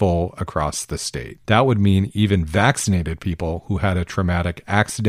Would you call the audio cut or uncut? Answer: uncut